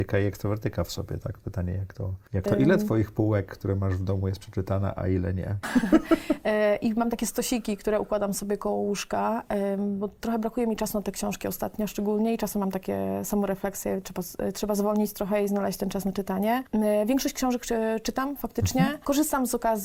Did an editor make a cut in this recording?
yes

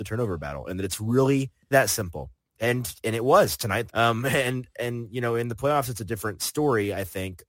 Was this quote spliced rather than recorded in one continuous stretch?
yes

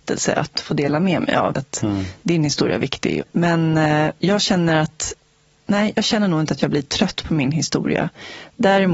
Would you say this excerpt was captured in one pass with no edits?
no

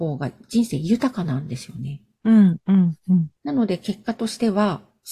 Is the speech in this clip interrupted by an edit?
yes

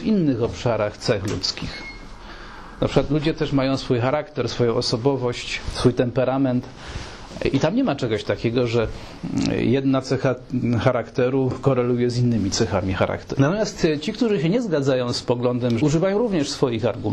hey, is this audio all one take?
no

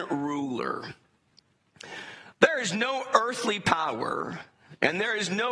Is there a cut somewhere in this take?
no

